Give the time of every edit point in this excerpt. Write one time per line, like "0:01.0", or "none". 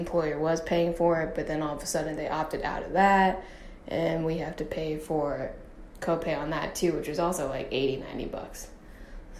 none